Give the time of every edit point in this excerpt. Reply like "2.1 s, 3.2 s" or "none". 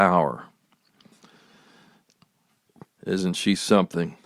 2.9 s

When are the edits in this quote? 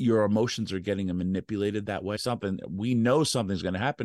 2.2 s

